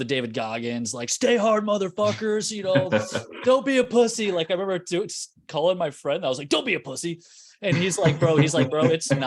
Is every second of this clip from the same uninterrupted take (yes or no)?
yes